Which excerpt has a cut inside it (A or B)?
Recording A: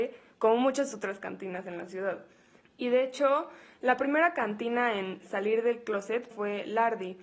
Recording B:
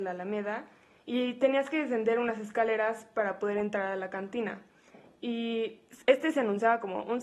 A